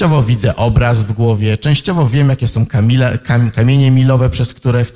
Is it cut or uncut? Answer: uncut